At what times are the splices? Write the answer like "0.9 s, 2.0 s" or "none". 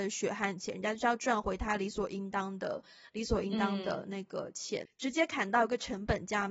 4.9 s